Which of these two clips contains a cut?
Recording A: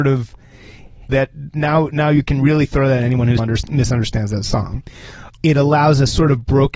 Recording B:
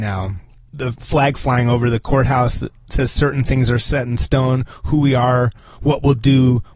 A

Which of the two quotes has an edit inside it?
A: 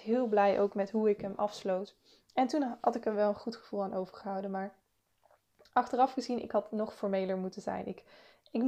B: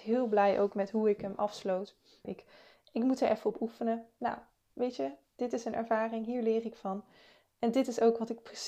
B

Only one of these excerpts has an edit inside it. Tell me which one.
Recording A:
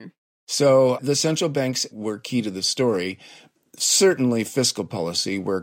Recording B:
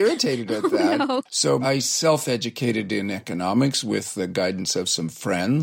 B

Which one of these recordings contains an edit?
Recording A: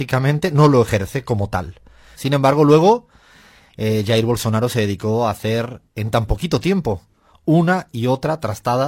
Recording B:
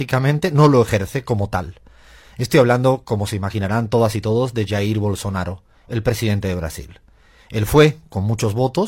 A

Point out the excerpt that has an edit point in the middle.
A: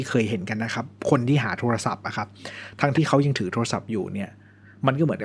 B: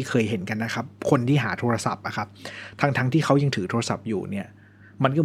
A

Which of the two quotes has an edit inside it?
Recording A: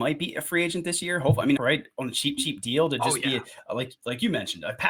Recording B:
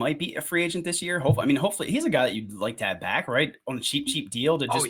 A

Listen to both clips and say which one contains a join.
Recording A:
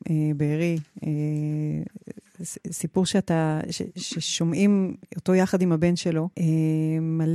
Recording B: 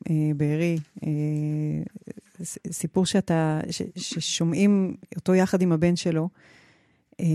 A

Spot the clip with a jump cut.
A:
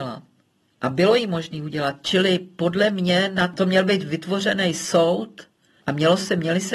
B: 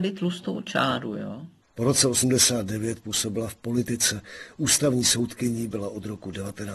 B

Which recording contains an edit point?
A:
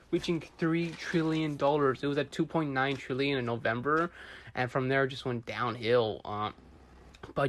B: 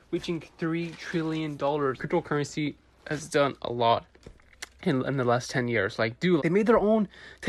B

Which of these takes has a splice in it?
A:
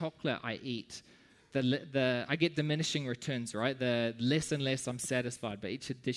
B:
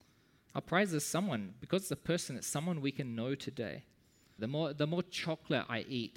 B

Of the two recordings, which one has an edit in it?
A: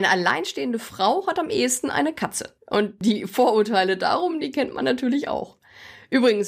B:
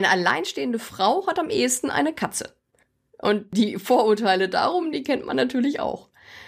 A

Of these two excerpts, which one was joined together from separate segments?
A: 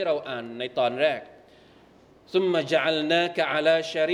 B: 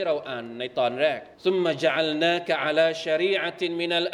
B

